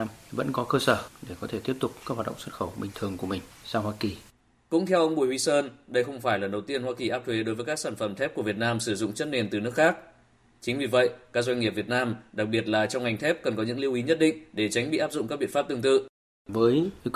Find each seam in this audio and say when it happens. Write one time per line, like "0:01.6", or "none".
none